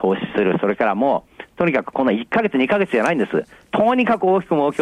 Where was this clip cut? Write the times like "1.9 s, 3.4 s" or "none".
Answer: none